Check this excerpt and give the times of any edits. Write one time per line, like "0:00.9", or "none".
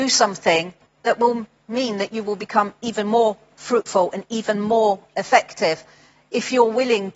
none